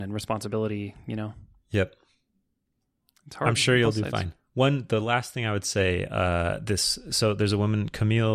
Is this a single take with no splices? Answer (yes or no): yes